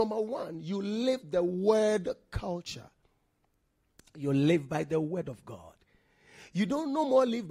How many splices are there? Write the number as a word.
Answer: zero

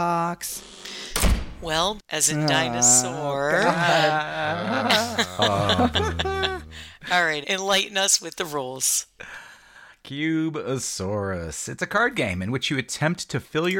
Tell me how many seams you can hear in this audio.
two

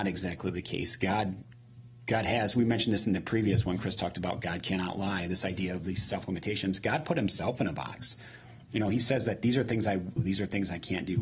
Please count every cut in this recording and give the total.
one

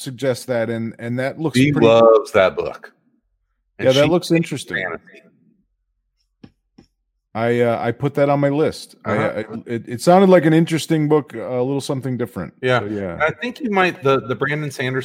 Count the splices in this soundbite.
one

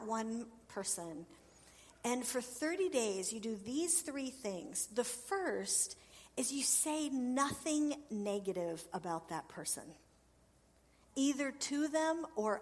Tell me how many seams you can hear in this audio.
zero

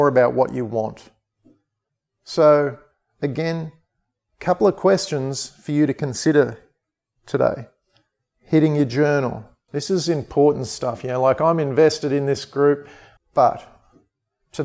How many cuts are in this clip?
two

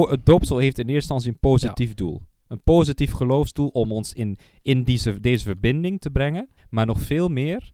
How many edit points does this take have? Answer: one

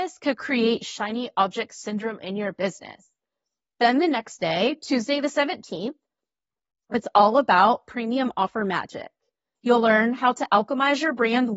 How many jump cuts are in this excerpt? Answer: one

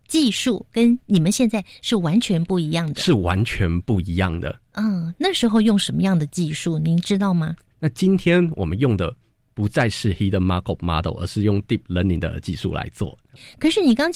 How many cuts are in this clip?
one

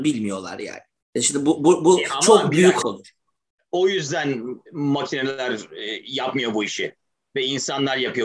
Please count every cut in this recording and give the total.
two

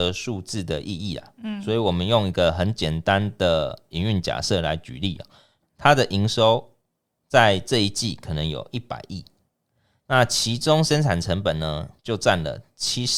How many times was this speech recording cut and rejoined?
two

